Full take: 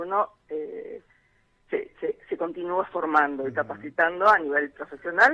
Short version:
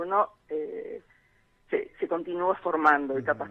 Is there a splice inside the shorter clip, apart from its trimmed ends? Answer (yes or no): yes